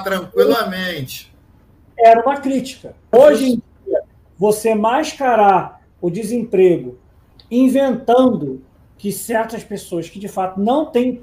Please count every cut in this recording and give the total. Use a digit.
1